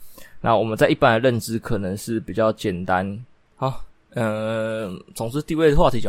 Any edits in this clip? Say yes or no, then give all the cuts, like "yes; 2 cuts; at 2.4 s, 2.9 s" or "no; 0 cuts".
yes; 1 cut; at 3.4 s